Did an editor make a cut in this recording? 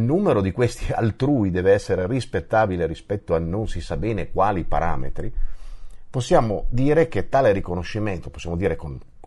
no; 0 cuts

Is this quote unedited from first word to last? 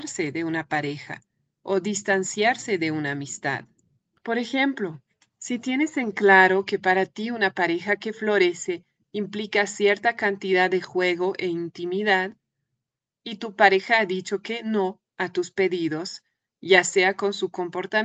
yes; 0 cuts

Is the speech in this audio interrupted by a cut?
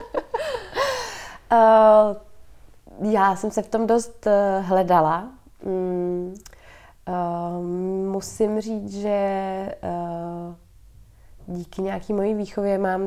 no; 0 cuts

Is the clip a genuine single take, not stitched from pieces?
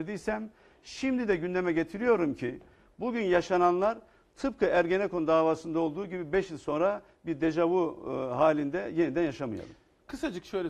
yes; 0 cuts

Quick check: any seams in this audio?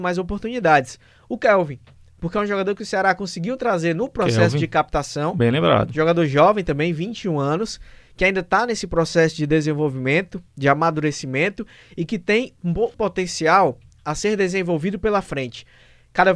yes; 1 cut; at 12.9 s

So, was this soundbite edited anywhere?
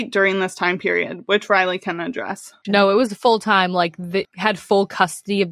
yes; 2 cuts; at 2.6 s, 4.2 s

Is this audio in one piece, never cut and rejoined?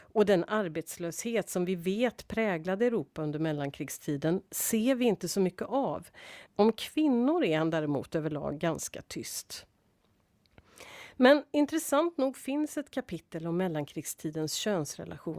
no; 1 cut; at 6.5 s

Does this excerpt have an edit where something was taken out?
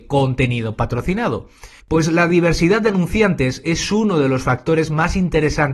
yes; 1 cut; at 1.8 s

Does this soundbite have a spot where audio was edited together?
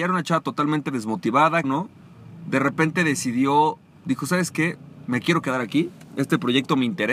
yes; 1 cut; at 1.6 s

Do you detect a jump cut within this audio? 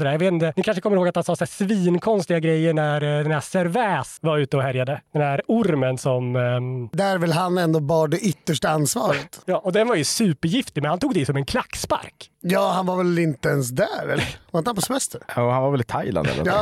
no; 0 cuts

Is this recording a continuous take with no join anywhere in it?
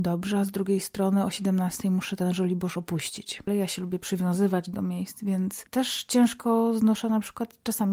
no; 1 cut; at 3.5 s

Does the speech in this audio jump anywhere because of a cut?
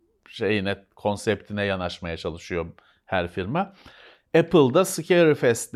no; 0 cuts

